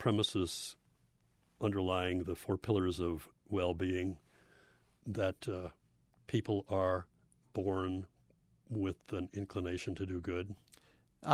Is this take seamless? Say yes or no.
yes